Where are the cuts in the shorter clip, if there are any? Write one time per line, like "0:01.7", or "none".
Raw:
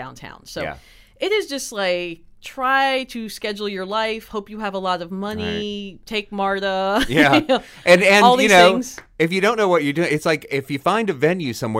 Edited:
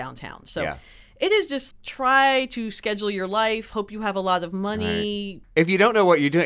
0:01.7
0:05.4